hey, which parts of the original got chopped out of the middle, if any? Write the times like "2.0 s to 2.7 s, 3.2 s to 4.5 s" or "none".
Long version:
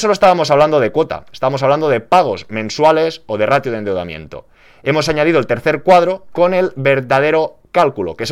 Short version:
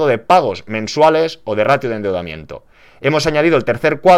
none